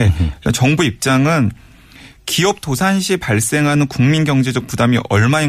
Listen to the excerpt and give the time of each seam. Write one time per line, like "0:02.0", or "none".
none